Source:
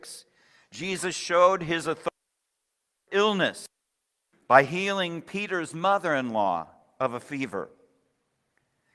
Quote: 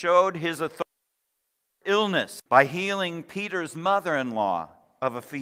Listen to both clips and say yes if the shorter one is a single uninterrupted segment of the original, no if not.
no